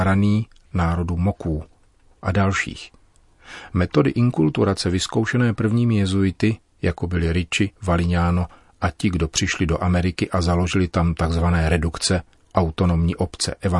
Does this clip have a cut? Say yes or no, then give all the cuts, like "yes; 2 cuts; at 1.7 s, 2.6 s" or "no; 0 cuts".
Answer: yes; 1 cut; at 7.7 s